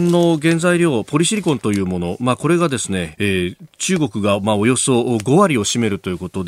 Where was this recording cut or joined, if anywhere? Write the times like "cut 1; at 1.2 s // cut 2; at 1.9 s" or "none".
cut 1; at 3.1 s